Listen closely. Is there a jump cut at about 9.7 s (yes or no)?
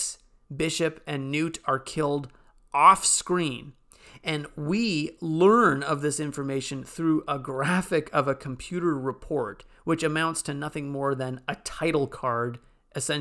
no